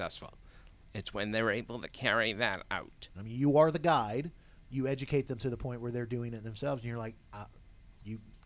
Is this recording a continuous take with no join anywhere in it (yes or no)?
no